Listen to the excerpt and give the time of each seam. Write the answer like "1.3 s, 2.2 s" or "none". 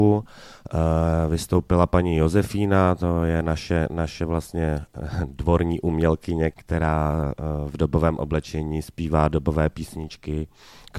6.5 s